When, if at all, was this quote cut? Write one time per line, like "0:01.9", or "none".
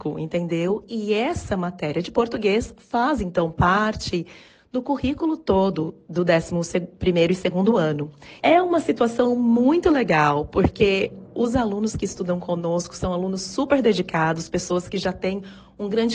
0:08.4